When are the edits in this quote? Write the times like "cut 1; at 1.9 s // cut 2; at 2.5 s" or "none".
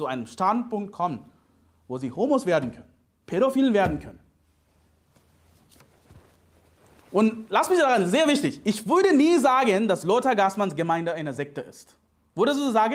none

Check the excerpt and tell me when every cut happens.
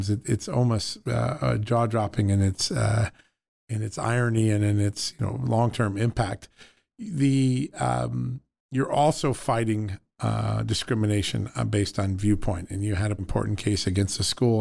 cut 1; at 13.2 s

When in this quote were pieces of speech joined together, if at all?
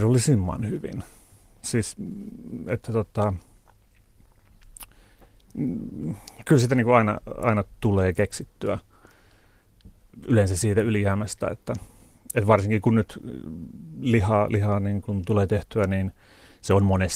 none

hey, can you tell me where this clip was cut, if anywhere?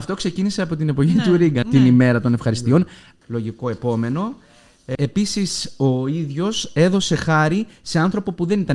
cut 1; at 1.6 s // cut 2; at 3.2 s // cut 3; at 4.9 s

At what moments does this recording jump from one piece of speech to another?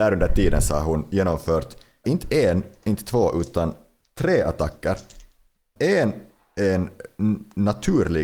cut 1; at 2.0 s // cut 2; at 5.8 s

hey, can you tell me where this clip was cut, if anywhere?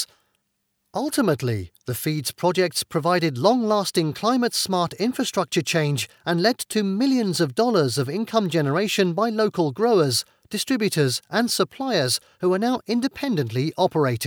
none

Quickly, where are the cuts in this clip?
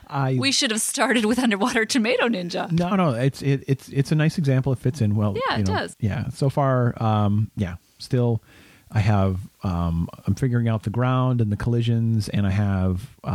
cut 1; at 2.9 s // cut 2; at 5.9 s

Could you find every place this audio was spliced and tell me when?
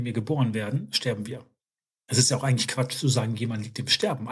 none

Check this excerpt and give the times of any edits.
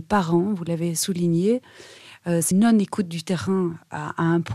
cut 1; at 2.5 s

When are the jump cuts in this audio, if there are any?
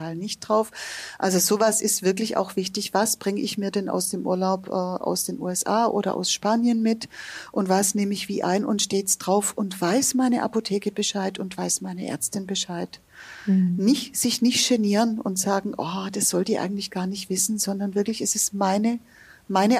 none

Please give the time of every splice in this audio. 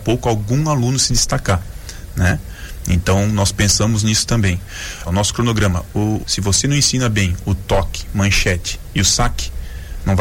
cut 1; at 5.1 s // cut 2; at 6.2 s

